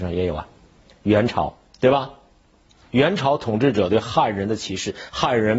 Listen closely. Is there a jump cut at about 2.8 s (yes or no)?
yes